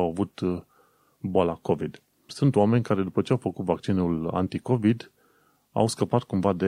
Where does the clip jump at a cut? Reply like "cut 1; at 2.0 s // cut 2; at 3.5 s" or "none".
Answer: cut 1; at 2.3 s